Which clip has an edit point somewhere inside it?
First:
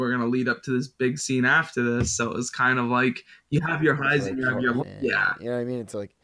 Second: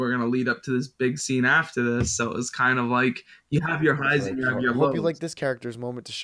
first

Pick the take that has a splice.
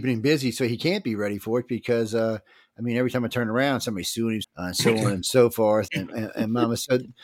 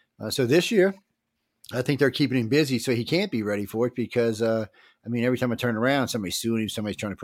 first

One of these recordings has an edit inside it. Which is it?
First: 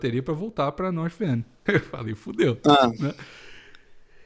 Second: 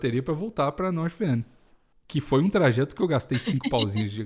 first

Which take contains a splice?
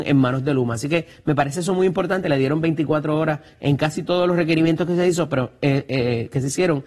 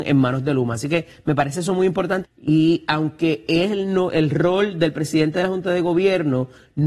second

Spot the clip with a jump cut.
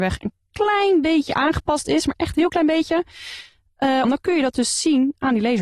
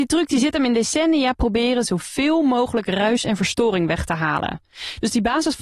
first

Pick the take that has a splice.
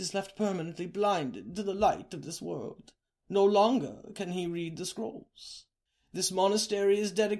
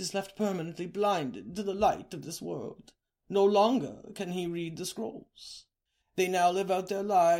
second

